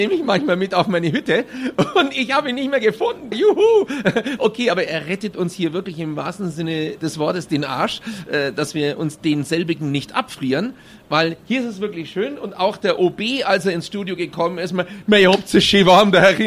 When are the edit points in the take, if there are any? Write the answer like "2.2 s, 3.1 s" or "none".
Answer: 3.3 s